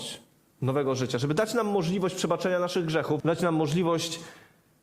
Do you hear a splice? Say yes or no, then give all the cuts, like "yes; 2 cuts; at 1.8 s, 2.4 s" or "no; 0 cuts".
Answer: yes; 1 cut; at 3.2 s